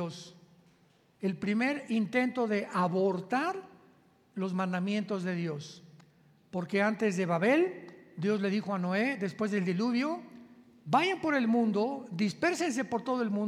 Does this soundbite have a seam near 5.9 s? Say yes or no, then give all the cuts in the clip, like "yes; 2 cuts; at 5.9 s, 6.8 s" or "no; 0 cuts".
no; 0 cuts